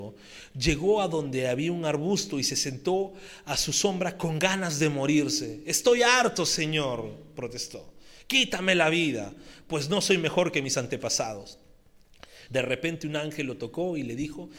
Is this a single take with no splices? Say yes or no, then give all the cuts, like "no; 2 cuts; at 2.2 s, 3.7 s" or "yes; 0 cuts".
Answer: no; 1 cut; at 12.5 s